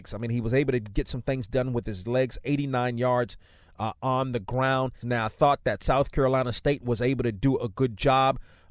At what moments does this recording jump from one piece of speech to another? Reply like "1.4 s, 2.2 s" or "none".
5.0 s